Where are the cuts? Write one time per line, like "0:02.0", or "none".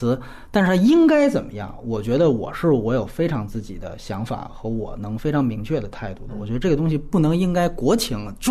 none